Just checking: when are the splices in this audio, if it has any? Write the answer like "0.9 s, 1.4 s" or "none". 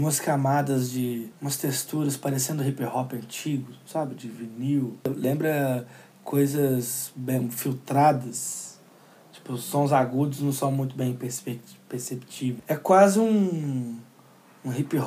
none